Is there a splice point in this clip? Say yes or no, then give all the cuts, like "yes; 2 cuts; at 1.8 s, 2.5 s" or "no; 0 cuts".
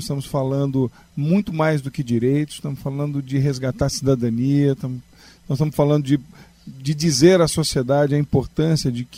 no; 0 cuts